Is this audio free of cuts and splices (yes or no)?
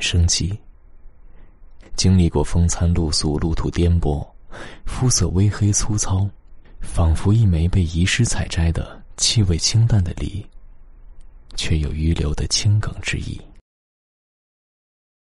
no